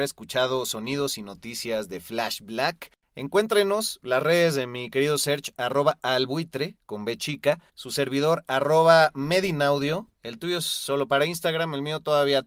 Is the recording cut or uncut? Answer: cut